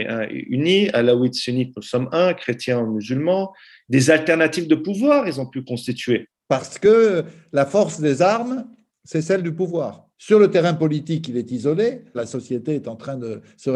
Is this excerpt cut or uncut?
cut